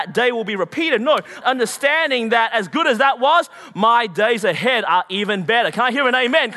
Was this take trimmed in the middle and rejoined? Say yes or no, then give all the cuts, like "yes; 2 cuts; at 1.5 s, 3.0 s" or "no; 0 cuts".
yes; 1 cut; at 1.4 s